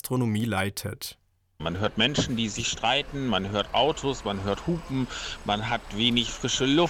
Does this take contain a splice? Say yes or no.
yes